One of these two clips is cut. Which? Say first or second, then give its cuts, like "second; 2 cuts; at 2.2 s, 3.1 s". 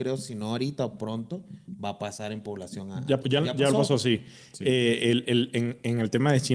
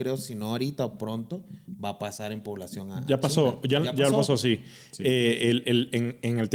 first; 1 cut; at 3.2 s